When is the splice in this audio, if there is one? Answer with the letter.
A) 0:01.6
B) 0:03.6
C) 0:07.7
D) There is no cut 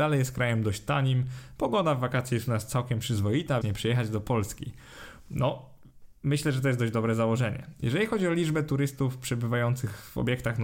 B